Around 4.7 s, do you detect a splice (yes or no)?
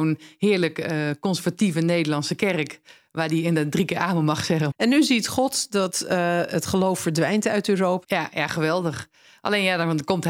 yes